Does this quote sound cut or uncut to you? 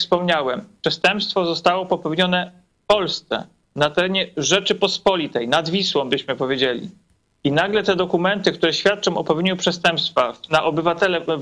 uncut